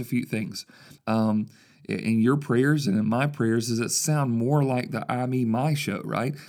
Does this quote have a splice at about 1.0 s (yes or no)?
yes